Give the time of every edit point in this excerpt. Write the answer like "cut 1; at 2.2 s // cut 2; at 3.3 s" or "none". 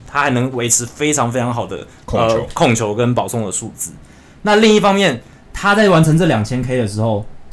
none